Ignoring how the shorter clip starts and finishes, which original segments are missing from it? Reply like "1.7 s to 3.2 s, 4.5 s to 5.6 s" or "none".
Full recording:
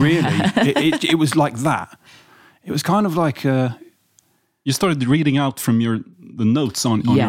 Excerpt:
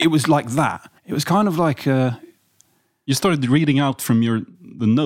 2.1 s to 2.6 s